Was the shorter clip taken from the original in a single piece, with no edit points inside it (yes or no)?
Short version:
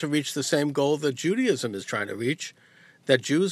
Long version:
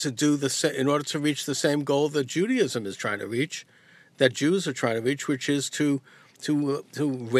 yes